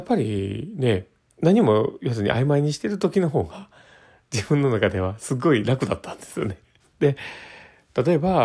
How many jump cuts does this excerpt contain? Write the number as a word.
one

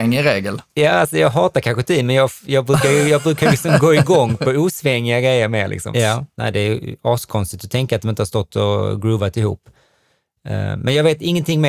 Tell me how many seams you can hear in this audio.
one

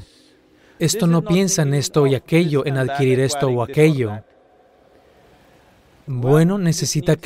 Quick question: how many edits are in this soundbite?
zero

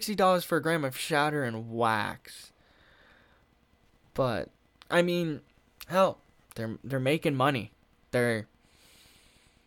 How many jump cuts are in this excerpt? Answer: zero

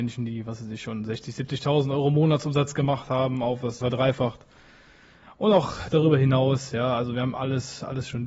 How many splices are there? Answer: one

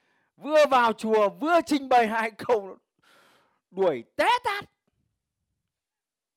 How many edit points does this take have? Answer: zero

